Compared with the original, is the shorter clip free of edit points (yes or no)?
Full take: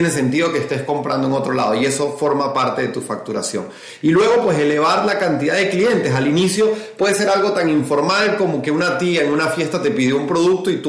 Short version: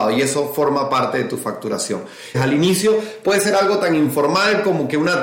no